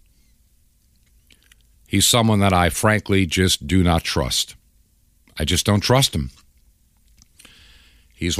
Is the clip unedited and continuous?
yes; 0 cuts

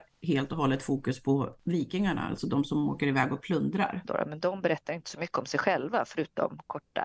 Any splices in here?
yes; 1 cut; at 4.0 s

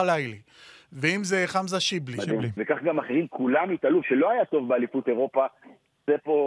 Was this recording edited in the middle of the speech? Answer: yes; 2 cuts; at 2.6 s, 4.0 s

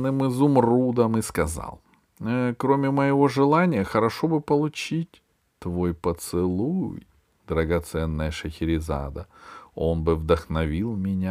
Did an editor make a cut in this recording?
no; 0 cuts

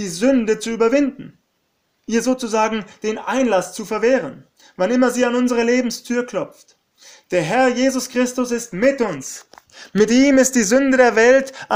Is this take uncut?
yes; 0 cuts

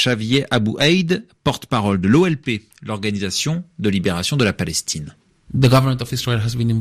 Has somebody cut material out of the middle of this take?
no; 0 cuts

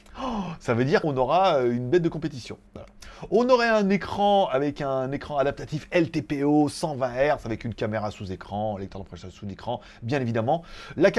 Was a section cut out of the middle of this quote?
yes; 1 cut; at 1.0 s

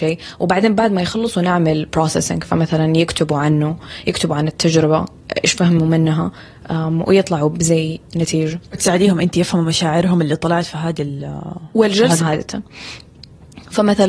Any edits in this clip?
yes; 1 cut; at 12.2 s

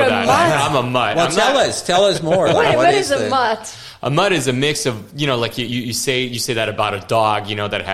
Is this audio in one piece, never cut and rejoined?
yes; 0 cuts

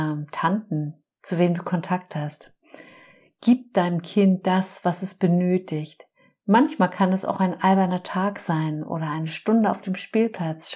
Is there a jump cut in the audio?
yes; 1 cut; at 1.0 s

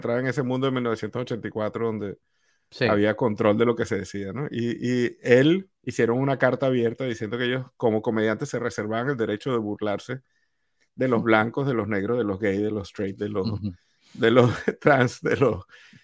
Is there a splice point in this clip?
yes; 1 cut; at 5.7 s

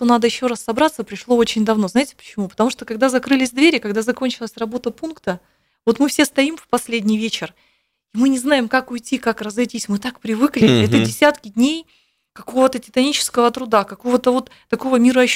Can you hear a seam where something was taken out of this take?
no; 0 cuts

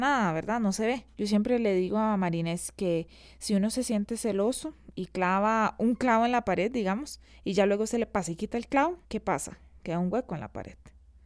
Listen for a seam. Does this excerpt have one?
yes; 2 cuts; at 1.1 s, 9.0 s

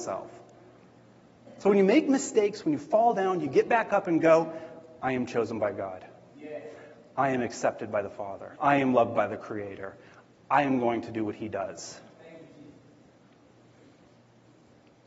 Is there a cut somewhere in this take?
yes; 1 cut; at 8.6 s

